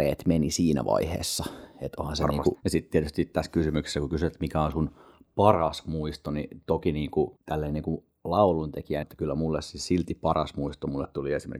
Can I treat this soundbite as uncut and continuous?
no; 3 cuts; at 2.5 s, 7.4 s, 9.0 s

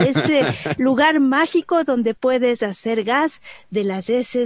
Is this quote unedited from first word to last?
yes; 0 cuts

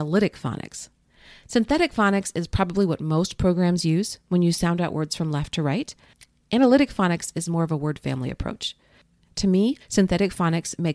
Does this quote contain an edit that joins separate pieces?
yes; 1 cut; at 9.8 s

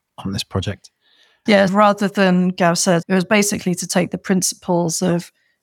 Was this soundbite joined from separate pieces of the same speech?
yes; 2 cuts; at 1.7 s, 3.0 s

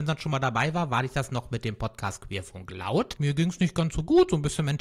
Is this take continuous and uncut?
no; 1 cut; at 3.2 s

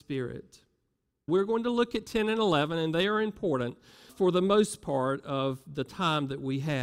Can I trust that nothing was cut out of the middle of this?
no; 2 cuts; at 1.3 s, 4.1 s

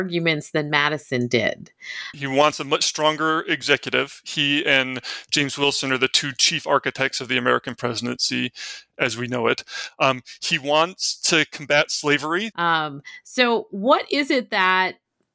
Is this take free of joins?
no; 2 cuts; at 2.1 s, 12.5 s

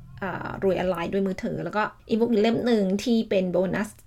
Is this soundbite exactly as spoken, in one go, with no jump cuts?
no; 1 cut; at 2.0 s

